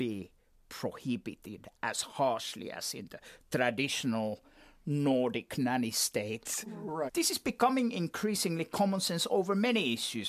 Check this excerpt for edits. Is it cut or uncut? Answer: cut